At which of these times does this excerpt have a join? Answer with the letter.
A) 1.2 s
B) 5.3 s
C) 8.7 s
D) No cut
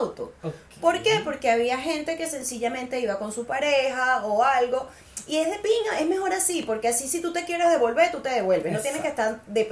D